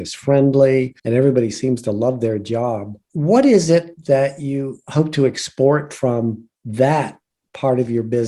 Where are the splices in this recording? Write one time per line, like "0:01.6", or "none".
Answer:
0:01.0
0:03.0